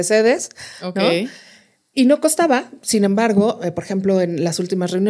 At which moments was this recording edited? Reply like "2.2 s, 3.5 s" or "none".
none